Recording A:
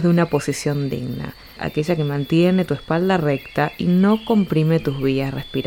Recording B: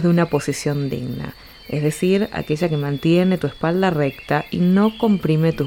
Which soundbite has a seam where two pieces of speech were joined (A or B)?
A